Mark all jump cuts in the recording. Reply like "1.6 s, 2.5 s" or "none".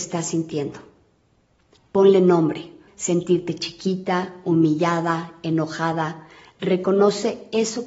2.9 s